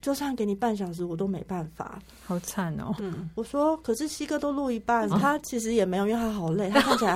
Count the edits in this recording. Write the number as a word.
two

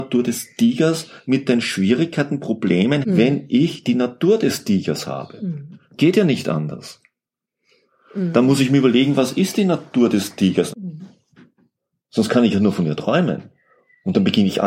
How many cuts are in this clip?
two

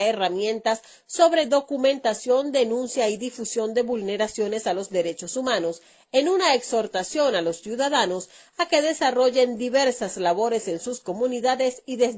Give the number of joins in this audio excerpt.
zero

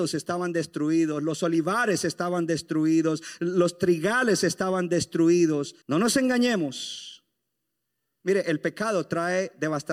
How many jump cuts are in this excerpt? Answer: two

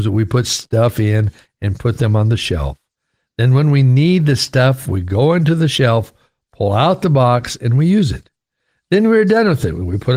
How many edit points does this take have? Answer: zero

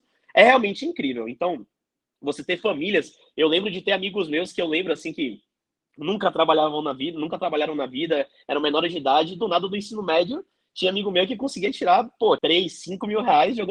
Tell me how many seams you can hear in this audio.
one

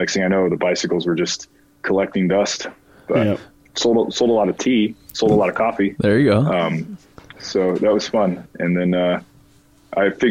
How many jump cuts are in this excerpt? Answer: two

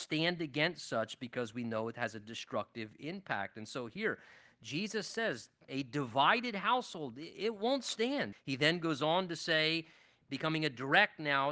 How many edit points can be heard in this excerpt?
two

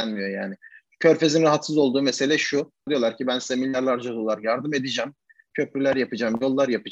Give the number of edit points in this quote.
one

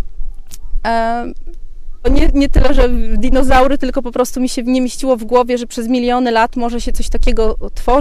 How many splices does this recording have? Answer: one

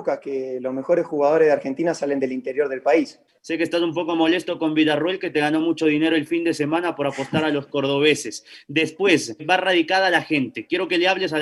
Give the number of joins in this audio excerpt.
two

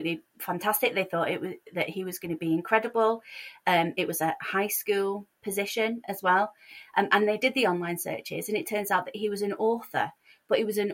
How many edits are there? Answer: zero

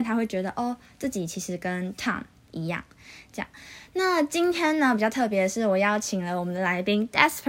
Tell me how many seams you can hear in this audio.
zero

